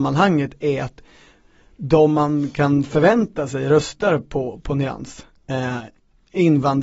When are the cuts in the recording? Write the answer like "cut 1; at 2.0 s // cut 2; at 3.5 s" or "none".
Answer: none